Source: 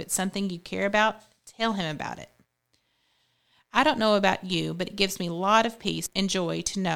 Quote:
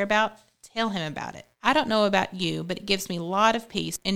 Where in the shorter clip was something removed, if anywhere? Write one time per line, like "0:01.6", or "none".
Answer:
0:01.5